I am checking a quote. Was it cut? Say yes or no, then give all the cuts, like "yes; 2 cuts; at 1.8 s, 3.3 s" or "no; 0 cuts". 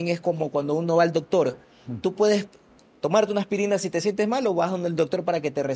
no; 0 cuts